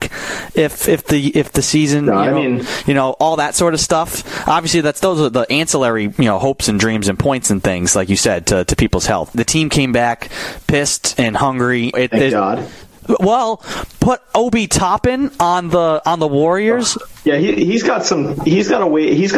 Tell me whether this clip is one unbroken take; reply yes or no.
no